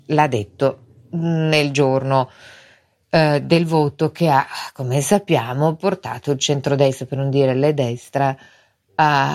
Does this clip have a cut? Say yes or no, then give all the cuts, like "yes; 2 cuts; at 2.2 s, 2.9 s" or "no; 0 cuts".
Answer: no; 0 cuts